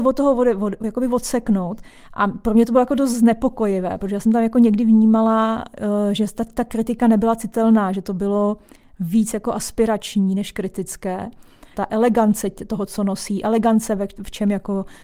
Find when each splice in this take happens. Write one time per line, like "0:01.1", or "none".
0:11.7